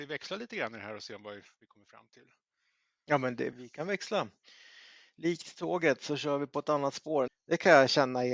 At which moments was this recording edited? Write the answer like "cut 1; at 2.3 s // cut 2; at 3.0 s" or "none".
cut 1; at 3.5 s // cut 2; at 7.3 s